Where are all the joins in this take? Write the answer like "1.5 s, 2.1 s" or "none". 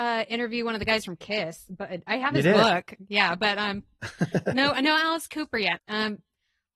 5.8 s